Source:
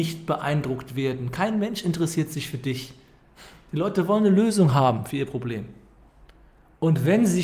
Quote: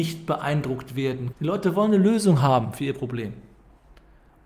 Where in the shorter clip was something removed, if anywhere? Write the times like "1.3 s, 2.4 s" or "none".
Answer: 1.3 s